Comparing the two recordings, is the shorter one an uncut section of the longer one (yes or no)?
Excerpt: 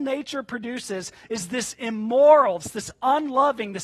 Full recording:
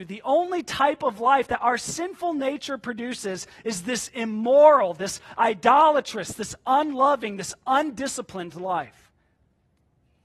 no